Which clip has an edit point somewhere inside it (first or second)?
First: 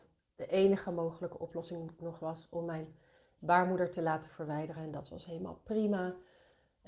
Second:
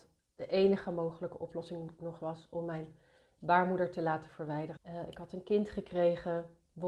second